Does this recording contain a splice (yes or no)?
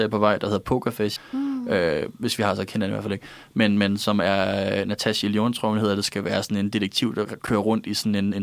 yes